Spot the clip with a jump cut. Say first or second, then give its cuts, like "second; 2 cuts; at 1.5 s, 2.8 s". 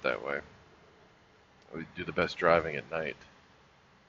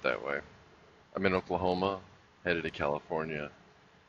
second; 2 cuts; at 1.0 s, 2.2 s